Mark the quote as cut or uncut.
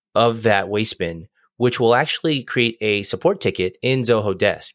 uncut